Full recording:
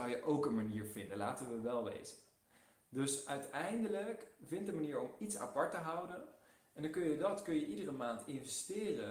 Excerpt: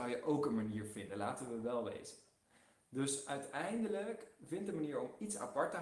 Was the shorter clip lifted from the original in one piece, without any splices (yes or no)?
yes